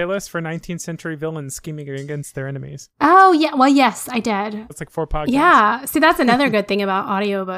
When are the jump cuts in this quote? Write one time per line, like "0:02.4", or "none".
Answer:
0:04.7